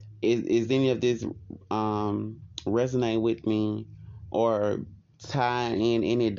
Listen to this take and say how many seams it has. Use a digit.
0